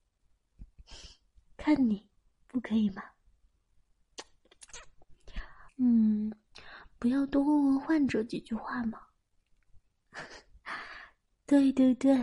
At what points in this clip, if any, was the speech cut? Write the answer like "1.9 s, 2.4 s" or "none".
5.7 s, 9.8 s